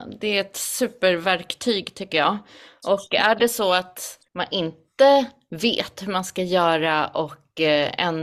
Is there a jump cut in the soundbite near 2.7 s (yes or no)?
no